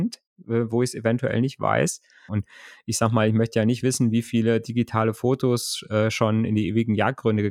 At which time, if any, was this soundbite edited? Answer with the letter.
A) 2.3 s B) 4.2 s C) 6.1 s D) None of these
A